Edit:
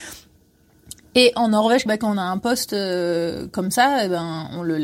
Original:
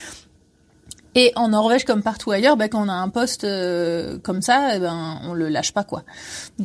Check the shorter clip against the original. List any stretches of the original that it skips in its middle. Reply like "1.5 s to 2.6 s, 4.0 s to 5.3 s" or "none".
1.9 s to 2.6 s